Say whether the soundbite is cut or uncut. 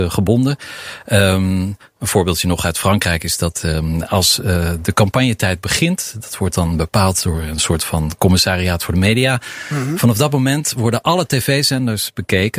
uncut